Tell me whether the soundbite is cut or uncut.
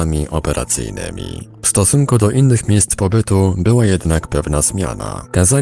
uncut